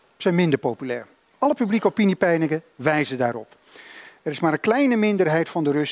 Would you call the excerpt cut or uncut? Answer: uncut